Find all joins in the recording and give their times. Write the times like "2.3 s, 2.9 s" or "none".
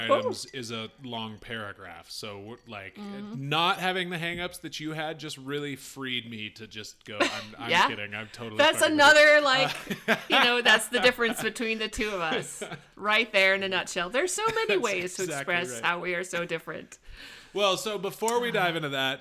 none